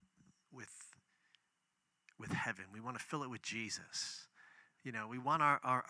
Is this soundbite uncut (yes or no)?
yes